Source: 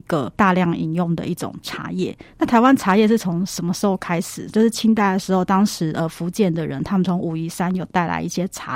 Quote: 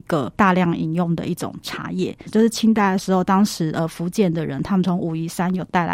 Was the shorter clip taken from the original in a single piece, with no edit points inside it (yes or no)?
no